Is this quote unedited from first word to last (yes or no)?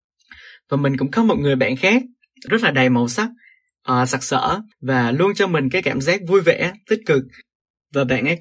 no